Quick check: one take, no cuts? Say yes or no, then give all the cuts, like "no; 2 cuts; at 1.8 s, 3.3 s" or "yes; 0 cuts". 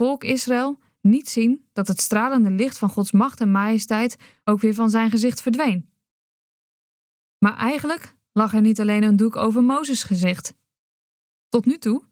yes; 0 cuts